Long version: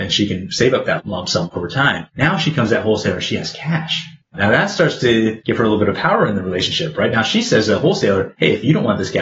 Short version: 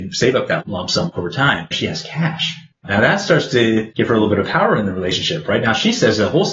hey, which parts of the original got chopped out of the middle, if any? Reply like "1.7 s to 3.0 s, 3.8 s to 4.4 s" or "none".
2.1 s to 3.2 s